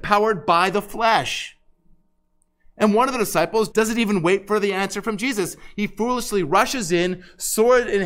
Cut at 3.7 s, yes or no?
yes